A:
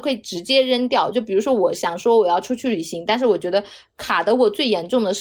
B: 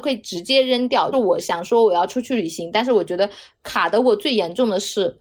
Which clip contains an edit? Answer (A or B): B